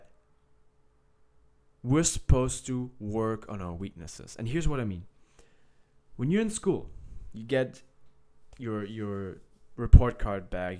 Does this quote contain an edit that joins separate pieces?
no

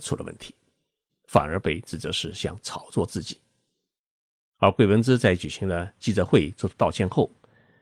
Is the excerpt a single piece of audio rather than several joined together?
no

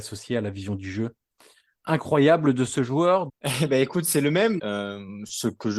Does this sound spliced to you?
yes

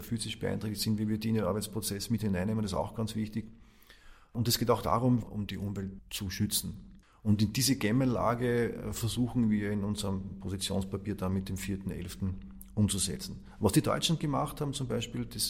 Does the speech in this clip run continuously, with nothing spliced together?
no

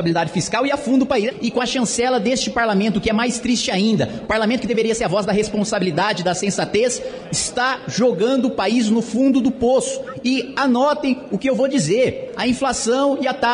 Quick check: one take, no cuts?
yes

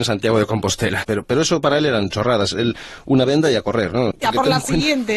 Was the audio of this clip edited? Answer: yes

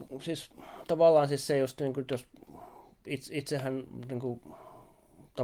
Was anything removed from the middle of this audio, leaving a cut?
no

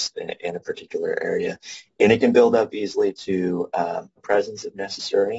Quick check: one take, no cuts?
no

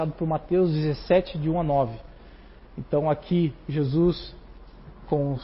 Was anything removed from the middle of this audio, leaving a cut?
no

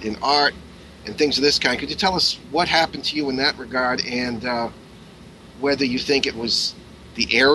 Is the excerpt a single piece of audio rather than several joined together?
yes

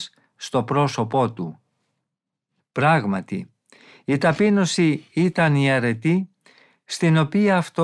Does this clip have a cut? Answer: yes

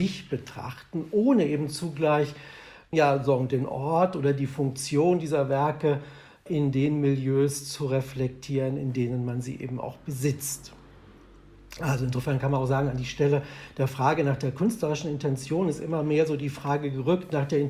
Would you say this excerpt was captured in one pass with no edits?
yes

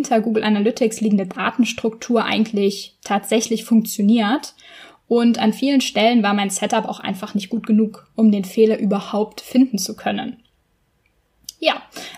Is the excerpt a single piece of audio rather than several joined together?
yes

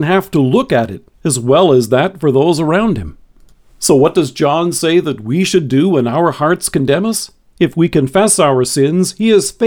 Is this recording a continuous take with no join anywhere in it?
no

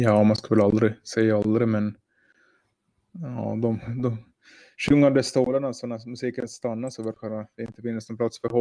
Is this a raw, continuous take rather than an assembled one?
yes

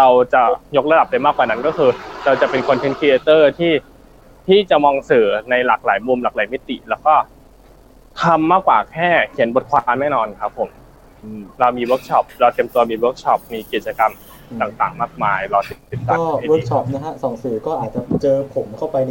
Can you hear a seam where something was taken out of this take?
no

